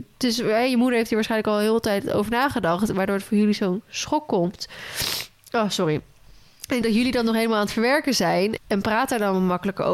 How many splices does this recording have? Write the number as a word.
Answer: two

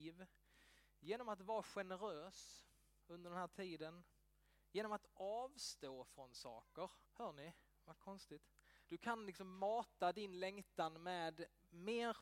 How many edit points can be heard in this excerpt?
two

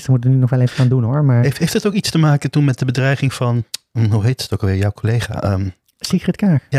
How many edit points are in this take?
zero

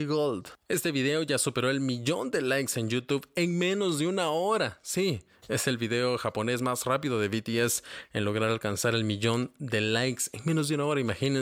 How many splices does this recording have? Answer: zero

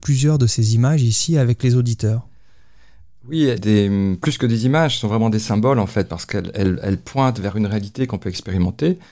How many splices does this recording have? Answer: one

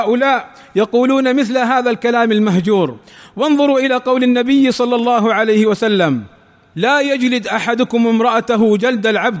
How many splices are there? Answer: zero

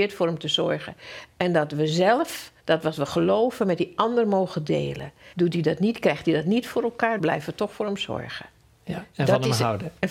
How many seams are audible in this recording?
three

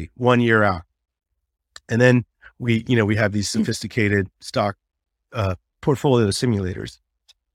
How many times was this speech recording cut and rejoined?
zero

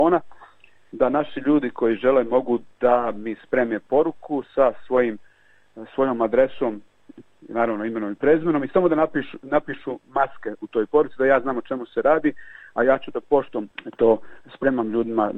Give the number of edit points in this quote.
zero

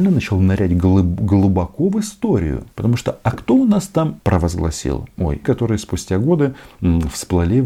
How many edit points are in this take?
three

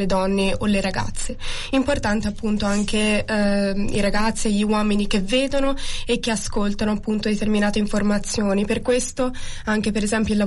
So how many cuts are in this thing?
zero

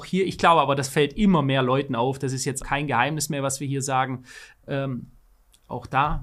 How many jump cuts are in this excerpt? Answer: two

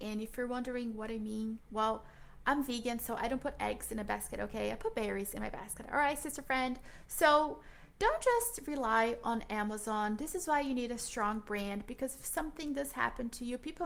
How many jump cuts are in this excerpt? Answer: zero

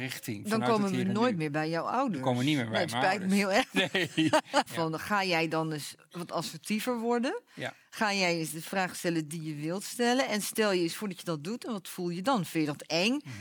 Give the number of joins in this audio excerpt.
one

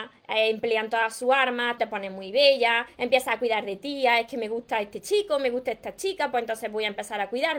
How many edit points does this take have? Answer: one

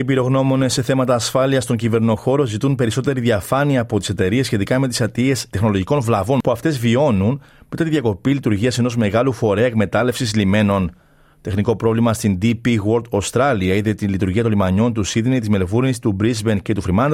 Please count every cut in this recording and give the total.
zero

